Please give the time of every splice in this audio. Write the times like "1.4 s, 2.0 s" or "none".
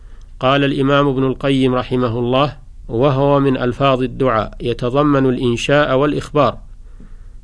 2.8 s

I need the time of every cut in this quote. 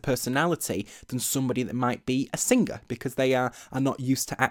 none

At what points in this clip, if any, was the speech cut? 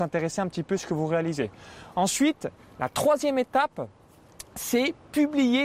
none

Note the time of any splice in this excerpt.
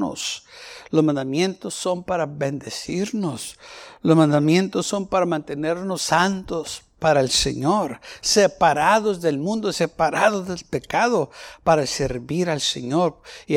none

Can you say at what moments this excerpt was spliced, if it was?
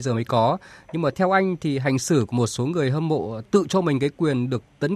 none

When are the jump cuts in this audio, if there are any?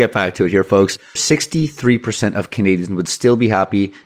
1.2 s

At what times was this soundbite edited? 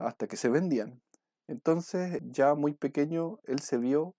2.2 s

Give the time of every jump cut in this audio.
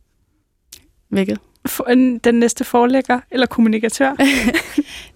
none

